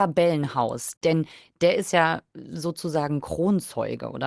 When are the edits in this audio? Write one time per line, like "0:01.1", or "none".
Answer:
0:01.0